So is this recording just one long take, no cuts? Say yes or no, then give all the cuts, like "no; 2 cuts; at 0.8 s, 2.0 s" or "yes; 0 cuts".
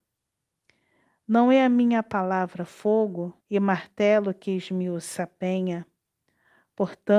no; 1 cut; at 3.4 s